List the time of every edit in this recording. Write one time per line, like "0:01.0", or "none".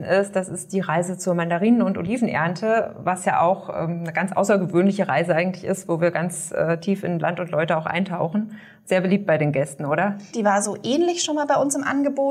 0:10.3